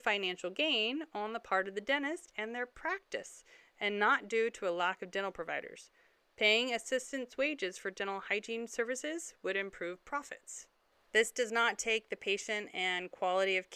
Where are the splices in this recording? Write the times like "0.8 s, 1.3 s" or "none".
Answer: none